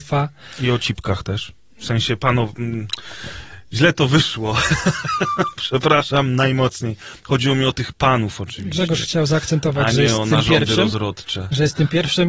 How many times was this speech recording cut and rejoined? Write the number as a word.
zero